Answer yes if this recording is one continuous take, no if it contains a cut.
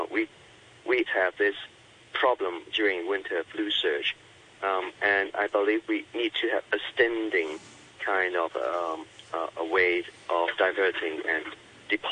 no